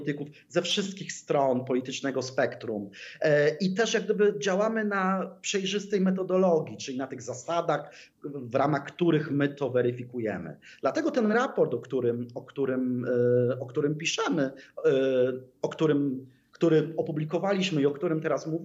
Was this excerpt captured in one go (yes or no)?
yes